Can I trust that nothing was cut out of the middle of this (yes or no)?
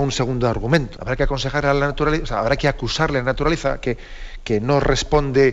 no